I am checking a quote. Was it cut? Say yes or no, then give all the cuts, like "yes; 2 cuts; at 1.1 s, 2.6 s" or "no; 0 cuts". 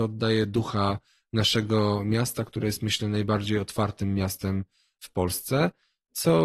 no; 0 cuts